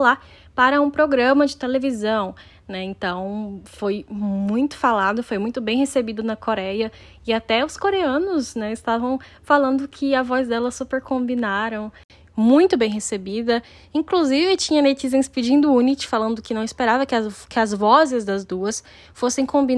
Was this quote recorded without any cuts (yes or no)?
yes